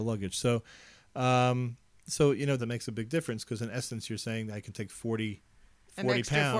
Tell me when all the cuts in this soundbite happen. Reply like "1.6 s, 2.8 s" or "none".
2.6 s

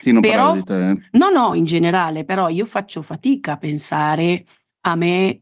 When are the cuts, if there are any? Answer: none

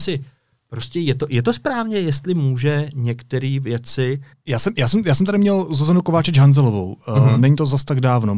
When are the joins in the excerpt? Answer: 4.3 s

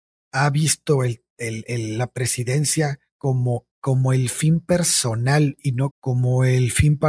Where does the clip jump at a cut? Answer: 3.7 s, 5.9 s

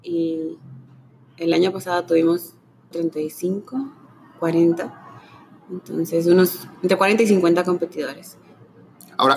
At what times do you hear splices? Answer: 2.9 s

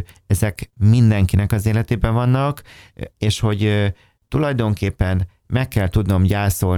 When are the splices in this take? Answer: 3.1 s

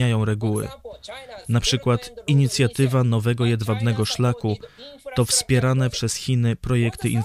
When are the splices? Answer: none

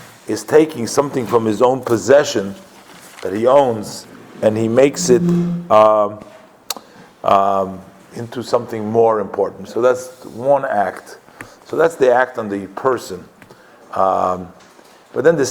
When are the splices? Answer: 9.7 s

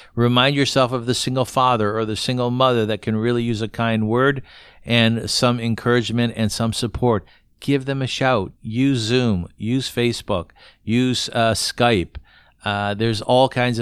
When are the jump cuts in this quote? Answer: 8.6 s

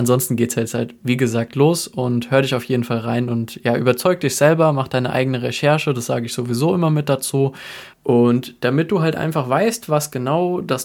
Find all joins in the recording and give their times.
7.9 s

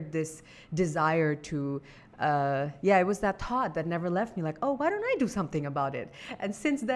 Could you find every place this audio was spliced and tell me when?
none

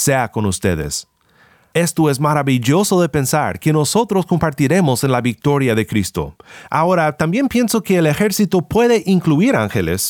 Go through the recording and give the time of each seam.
none

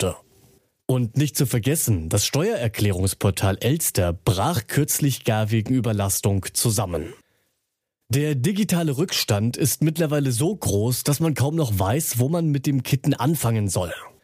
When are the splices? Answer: none

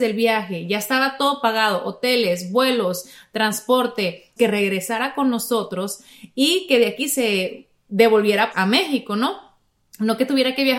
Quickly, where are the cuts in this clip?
4.4 s, 8.5 s

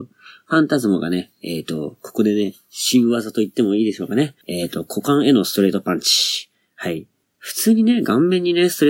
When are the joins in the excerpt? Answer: 4.4 s

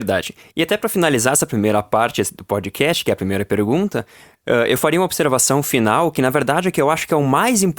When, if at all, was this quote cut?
none

